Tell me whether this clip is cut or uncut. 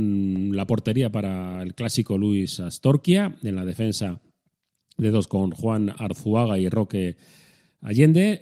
uncut